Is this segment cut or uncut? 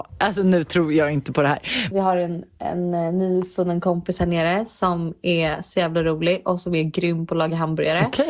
cut